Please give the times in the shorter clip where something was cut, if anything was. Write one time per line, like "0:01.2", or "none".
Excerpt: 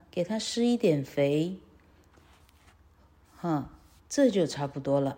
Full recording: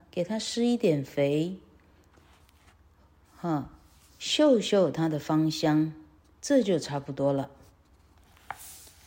0:04.0